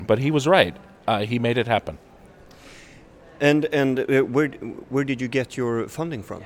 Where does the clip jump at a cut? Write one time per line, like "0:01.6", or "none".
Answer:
none